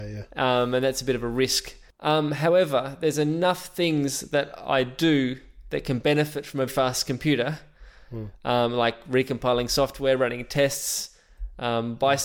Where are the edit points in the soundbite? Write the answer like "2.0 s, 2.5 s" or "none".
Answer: 6.7 s